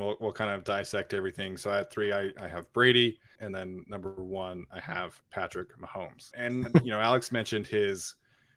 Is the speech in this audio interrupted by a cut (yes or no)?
yes